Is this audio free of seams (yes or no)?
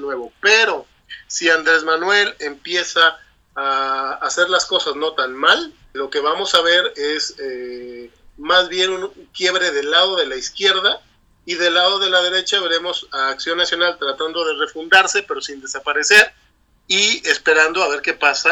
no